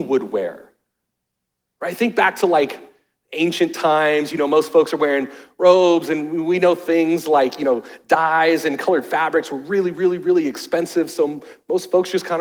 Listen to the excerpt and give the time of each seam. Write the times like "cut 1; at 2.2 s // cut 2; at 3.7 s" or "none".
none